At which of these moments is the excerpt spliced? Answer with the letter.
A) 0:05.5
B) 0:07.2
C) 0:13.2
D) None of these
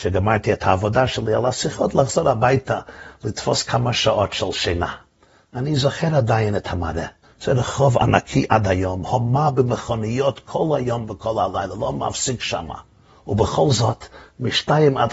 B